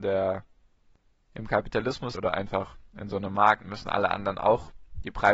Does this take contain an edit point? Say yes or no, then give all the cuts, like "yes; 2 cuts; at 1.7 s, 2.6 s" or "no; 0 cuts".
yes; 2 cuts; at 2.1 s, 3.6 s